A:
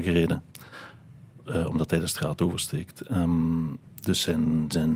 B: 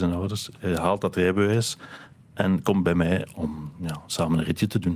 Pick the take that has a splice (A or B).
B